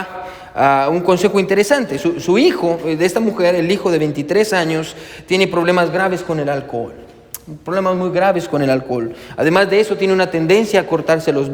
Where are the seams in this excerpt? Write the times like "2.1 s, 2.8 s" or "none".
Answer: none